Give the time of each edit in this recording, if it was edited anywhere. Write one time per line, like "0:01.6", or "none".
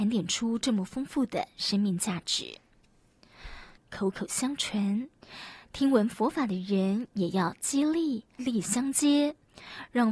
0:03.8
0:08.4